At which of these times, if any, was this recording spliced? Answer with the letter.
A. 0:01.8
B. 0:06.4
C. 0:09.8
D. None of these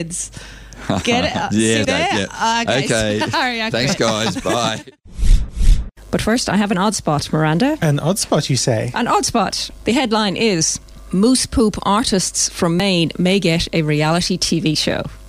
A